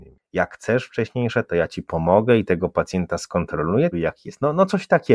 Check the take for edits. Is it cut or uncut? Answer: cut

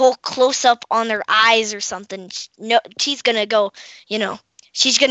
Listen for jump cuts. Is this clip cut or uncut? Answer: uncut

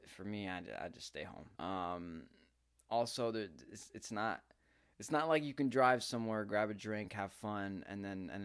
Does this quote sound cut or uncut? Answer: cut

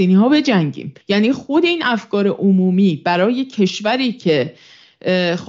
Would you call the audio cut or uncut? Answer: cut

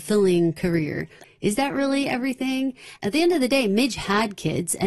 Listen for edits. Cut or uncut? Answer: cut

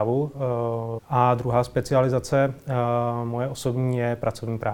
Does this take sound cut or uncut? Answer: cut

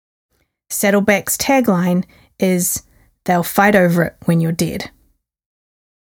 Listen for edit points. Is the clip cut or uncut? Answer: uncut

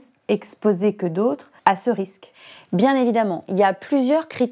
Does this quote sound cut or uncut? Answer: cut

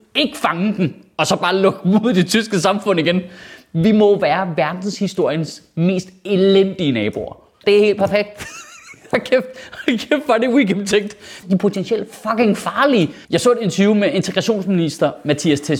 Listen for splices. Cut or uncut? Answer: cut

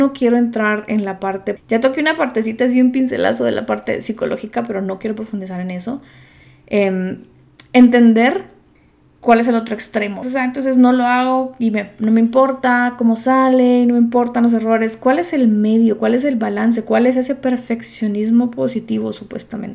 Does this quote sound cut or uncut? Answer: cut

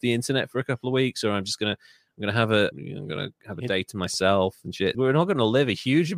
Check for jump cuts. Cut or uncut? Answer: cut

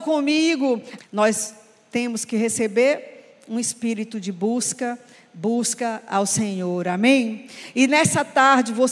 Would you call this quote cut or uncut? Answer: cut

